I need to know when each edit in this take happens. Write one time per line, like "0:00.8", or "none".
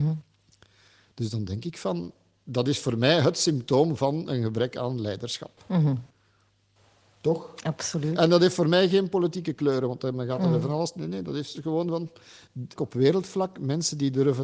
0:12.8

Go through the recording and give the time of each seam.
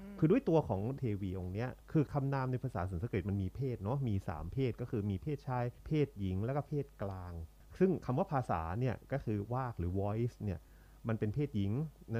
none

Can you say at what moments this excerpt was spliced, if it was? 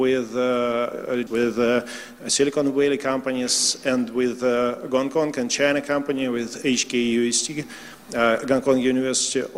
0:01.3

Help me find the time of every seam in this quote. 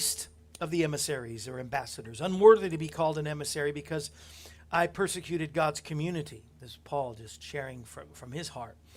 none

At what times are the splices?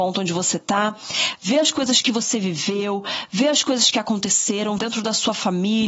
0:04.8

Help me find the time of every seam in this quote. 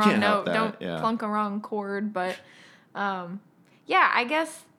none

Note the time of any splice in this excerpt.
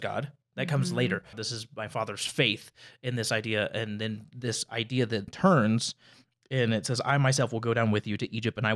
0:01.3
0:05.3

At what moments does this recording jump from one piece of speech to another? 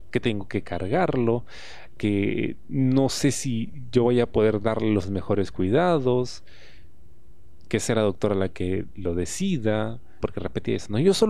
0:02.0
0:07.7
0:10.2

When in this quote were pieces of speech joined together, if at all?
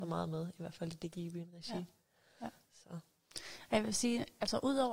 none

